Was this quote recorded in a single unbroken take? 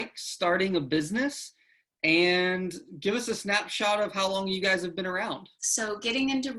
no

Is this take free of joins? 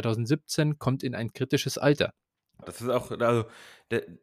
no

